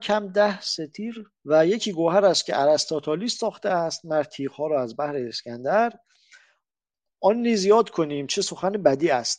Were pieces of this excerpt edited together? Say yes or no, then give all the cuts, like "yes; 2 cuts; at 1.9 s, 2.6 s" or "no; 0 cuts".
yes; 1 cut; at 1.4 s